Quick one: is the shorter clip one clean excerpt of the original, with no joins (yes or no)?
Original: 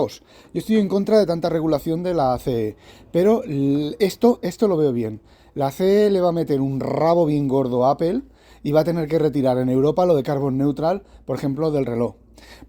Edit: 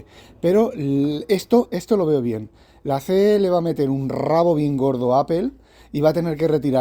yes